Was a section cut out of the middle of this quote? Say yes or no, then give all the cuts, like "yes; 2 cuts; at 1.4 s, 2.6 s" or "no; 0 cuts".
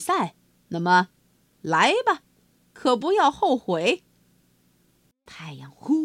no; 0 cuts